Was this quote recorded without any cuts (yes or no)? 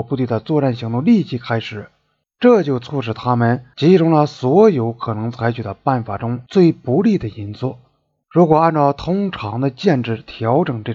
yes